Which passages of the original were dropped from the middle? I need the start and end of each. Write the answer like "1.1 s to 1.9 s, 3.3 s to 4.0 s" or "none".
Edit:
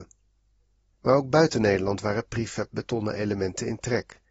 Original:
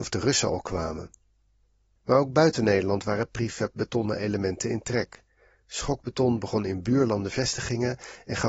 none